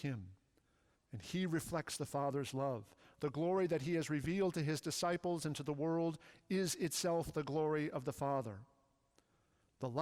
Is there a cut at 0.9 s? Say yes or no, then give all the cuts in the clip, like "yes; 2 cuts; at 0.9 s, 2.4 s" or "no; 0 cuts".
yes; 1 cut; at 0.9 s